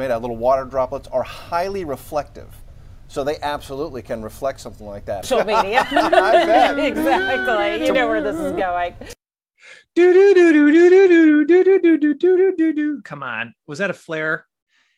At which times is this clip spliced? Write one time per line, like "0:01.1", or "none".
0:05.2